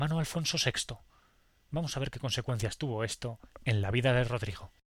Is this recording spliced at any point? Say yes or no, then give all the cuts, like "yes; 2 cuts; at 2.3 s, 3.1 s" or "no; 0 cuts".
no; 0 cuts